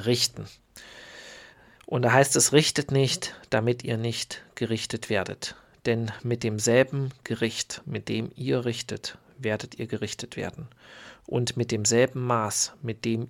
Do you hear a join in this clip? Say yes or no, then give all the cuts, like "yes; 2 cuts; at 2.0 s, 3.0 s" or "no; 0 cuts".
no; 0 cuts